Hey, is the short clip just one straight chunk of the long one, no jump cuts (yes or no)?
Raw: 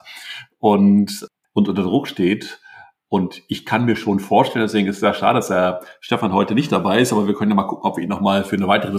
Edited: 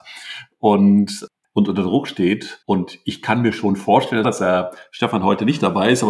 no